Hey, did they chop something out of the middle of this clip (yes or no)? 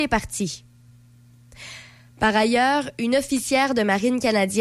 no